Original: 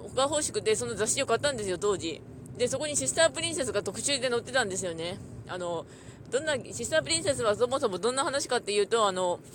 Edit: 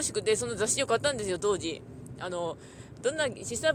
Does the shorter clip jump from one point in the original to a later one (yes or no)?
yes